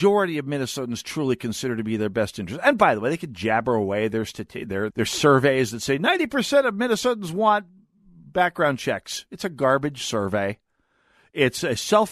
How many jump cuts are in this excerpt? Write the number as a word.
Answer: one